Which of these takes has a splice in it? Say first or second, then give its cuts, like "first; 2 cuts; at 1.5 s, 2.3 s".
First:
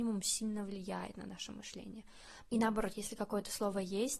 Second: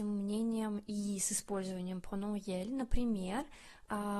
first; 1 cut; at 2.5 s